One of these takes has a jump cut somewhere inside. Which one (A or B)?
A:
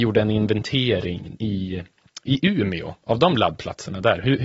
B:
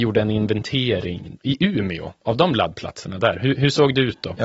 B